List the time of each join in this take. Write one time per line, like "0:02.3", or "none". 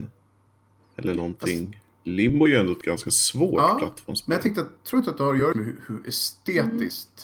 0:05.5